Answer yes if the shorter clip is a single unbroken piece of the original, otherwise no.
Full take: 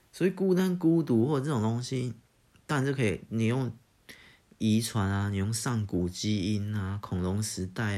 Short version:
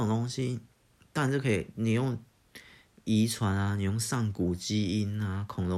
yes